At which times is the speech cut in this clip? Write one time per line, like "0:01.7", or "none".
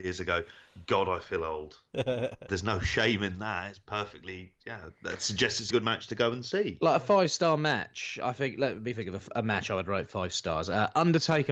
0:02.5
0:05.7